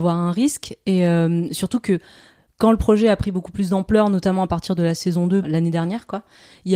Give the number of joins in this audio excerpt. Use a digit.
1